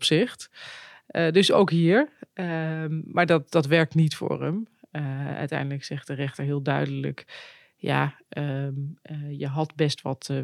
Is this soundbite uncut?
yes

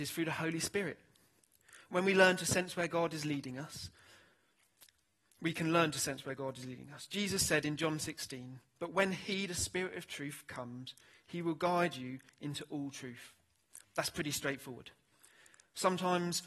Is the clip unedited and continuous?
no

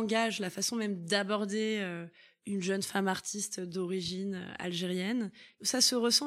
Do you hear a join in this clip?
no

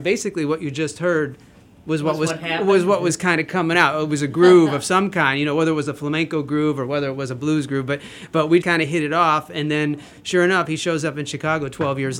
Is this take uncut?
no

